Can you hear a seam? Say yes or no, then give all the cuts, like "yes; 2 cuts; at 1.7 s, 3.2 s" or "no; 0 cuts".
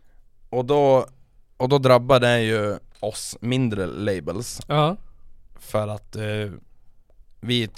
yes; 1 cut; at 2.9 s